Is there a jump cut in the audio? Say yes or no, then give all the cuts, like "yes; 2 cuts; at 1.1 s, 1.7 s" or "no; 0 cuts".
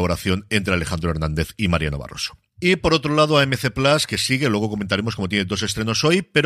no; 0 cuts